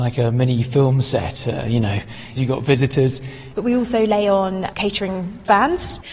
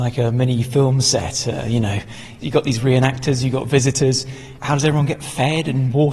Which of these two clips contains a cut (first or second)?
first